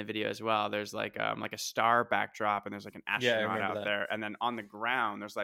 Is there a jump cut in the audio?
no; 0 cuts

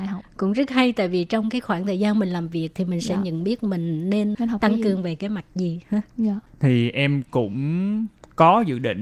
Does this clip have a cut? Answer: yes; 1 cut; at 4.3 s

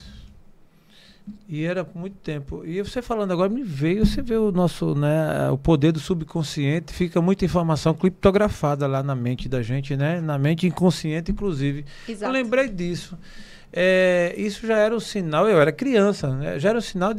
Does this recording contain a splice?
no; 0 cuts

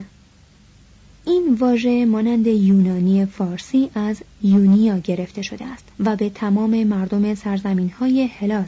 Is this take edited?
yes; 1 cut; at 5.9 s

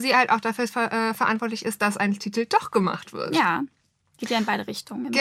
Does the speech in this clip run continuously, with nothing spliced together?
yes; 0 cuts

